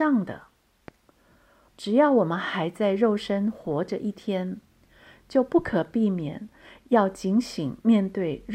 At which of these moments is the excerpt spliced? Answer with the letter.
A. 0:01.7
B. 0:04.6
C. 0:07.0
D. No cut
A